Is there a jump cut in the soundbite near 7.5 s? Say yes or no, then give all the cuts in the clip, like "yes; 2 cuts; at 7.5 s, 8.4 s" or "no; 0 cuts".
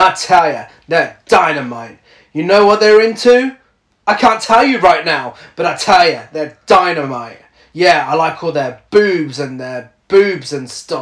no; 0 cuts